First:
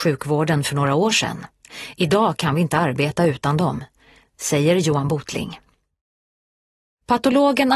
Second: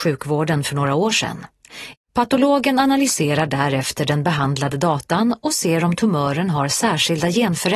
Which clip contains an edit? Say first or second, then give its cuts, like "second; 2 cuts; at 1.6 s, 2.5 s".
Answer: second; 1 cut; at 1.9 s